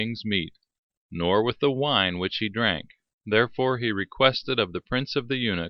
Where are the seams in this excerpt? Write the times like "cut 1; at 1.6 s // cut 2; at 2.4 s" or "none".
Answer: none